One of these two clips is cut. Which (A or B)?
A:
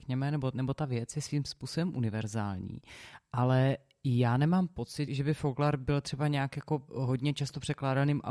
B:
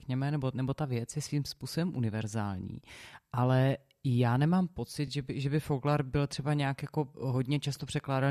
A